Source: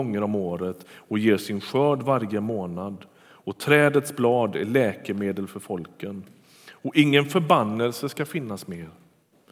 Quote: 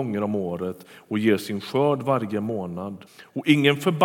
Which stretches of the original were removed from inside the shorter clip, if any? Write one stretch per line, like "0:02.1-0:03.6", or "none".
0:03.1-0:06.5